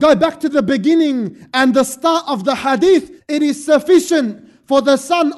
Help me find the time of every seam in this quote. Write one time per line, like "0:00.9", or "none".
0:03.2